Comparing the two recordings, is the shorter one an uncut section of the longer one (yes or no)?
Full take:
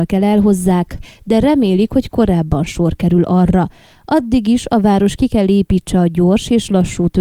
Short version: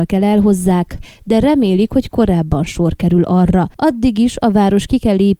no